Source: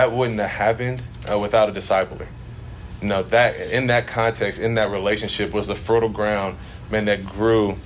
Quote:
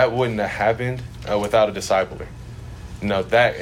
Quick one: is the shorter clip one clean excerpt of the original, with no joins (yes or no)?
yes